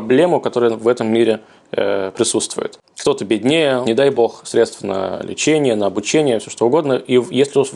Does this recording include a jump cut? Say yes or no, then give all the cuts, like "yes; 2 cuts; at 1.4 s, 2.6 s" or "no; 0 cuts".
yes; 1 cut; at 3.8 s